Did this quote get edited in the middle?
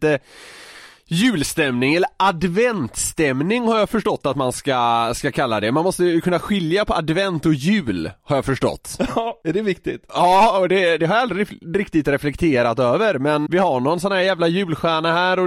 yes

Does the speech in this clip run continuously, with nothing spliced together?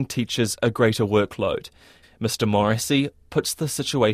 no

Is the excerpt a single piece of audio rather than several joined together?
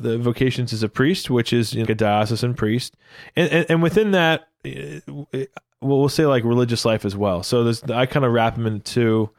no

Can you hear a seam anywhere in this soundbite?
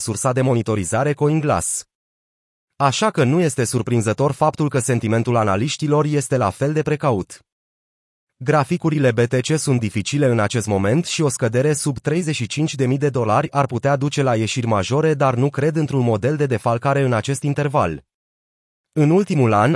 no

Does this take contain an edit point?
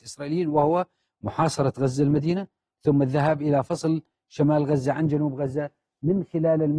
no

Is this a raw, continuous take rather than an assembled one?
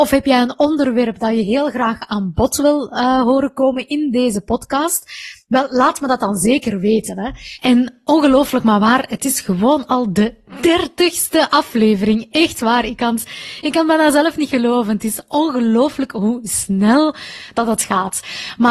no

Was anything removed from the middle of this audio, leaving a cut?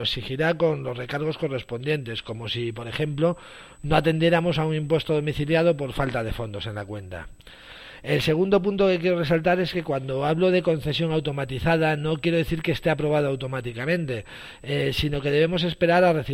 no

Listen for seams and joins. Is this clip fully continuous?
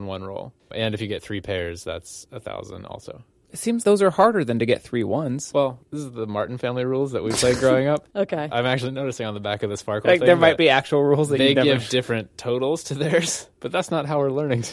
no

